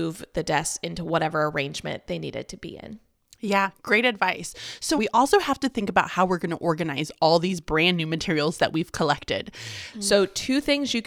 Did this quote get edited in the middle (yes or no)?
yes